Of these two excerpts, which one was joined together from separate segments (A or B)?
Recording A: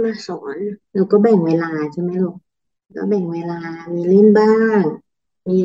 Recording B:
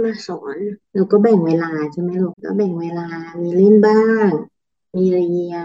B